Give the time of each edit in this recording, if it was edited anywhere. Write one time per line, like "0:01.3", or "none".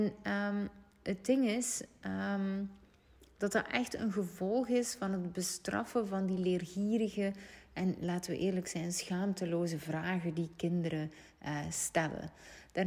none